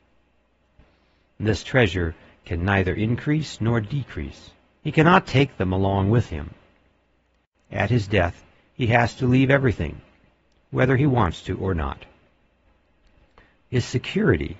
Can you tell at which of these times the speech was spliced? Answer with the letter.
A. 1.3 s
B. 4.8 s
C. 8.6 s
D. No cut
B